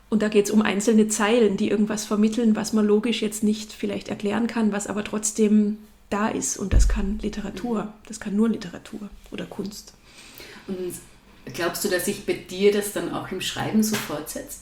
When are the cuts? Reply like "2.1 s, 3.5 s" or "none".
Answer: none